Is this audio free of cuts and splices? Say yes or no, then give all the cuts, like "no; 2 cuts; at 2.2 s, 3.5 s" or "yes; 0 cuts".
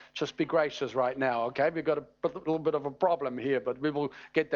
yes; 0 cuts